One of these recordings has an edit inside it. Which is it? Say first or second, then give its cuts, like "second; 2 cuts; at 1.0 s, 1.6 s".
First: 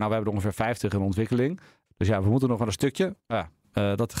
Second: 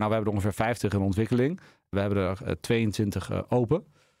first; 2 cuts; at 1.9 s, 3.2 s